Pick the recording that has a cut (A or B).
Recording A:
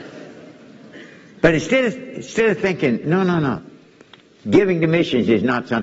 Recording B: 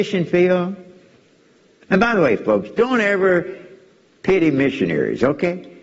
A